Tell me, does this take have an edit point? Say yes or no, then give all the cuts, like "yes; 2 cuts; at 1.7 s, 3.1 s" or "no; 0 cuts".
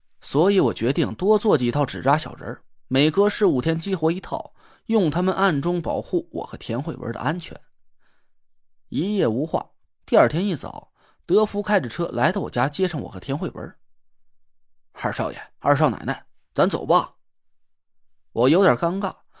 no; 0 cuts